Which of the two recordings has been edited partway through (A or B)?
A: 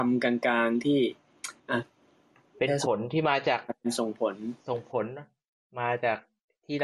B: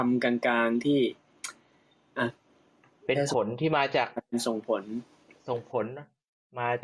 A